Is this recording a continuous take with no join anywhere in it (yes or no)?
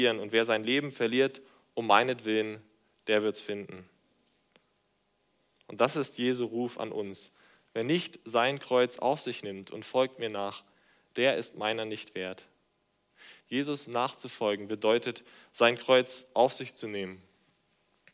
yes